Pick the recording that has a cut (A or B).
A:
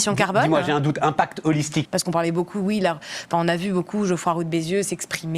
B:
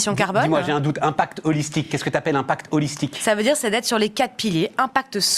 A